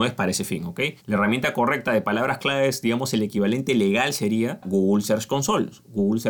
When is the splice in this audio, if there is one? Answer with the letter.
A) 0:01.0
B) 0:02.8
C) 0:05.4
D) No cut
A